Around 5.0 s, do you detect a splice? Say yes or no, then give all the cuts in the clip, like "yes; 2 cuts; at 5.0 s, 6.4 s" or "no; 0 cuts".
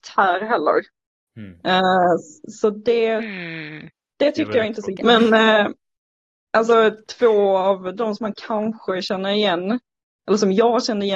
yes; 1 cut; at 5.0 s